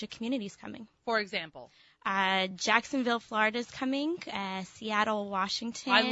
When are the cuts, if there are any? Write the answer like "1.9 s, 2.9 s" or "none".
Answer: none